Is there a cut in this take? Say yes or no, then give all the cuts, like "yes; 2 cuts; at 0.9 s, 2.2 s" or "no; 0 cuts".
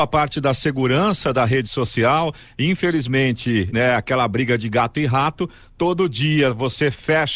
yes; 1 cut; at 3.7 s